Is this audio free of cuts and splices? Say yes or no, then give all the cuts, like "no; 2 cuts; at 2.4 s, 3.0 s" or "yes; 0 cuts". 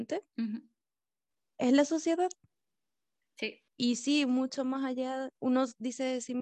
yes; 0 cuts